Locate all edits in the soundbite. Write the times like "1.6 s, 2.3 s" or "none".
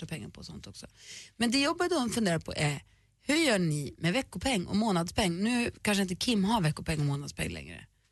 none

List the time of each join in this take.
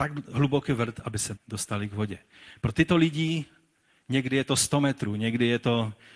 1.4 s

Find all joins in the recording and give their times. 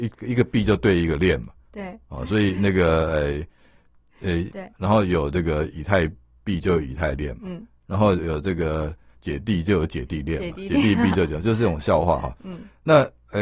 4.5 s

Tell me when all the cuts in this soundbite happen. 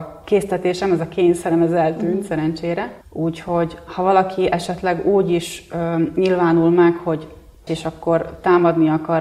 3.0 s, 7.7 s

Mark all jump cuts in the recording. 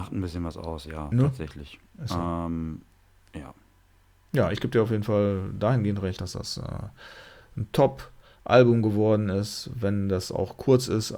none

